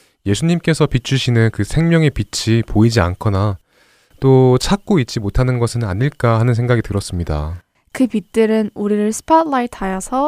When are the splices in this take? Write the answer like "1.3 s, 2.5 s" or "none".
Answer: 7.8 s

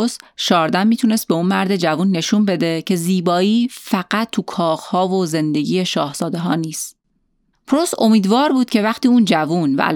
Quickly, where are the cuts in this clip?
7.5 s

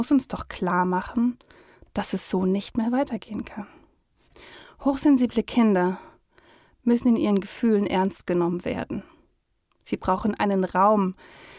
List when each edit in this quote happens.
none

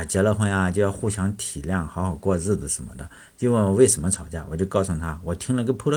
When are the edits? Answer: none

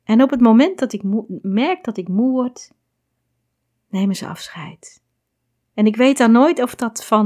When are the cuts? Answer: none

